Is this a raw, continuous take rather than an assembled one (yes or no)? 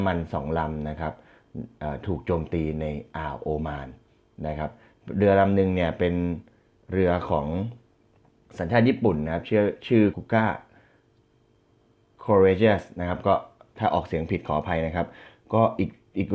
no